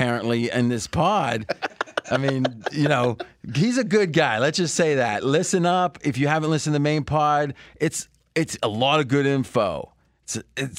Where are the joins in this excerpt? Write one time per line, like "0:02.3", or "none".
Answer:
none